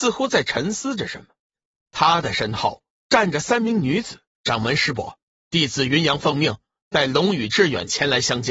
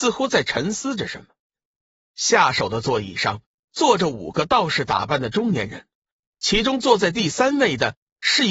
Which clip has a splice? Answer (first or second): first